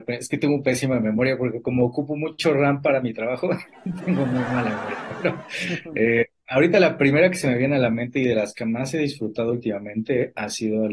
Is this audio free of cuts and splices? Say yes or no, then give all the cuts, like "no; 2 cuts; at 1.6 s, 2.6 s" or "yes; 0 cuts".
yes; 0 cuts